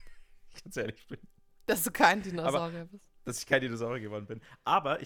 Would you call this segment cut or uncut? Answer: uncut